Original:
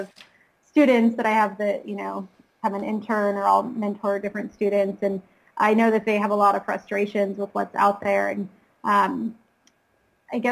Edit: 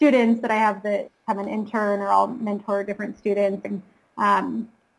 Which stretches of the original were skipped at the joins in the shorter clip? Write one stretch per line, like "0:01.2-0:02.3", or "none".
0:01.8-0:02.4
0:05.0-0:08.3